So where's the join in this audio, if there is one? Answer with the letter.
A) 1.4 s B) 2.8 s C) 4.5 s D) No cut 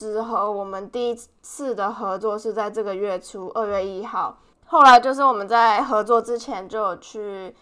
C